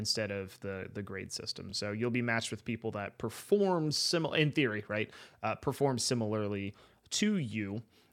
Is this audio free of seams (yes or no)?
yes